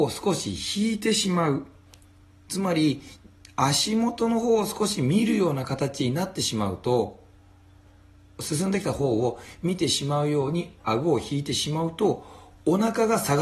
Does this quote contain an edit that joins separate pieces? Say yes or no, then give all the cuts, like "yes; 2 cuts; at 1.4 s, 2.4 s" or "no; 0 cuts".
yes; 1 cut; at 8.4 s